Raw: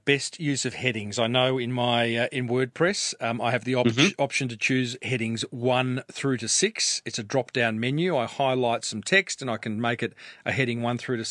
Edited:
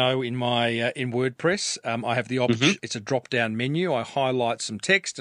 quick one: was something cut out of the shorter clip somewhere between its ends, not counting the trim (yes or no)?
yes